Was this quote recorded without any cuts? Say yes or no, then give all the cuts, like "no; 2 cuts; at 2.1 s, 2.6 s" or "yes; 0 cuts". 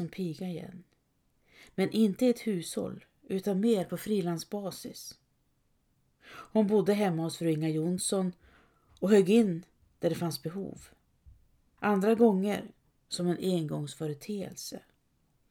no; 1 cut; at 11.8 s